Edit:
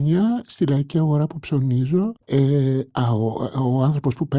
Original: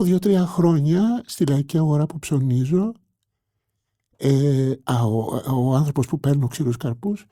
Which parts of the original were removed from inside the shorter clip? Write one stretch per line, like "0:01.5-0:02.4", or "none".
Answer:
0:03.0-0:04.1